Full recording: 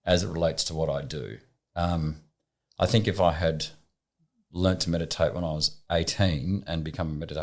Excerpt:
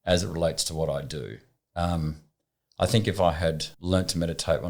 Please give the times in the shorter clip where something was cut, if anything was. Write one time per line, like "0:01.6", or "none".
0:03.7